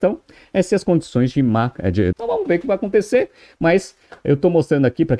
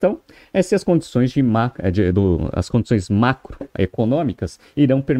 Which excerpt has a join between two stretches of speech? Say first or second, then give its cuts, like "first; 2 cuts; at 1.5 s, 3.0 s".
first; 1 cut; at 2.1 s